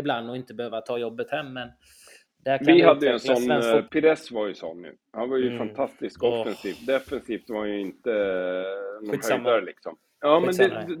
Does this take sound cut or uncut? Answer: cut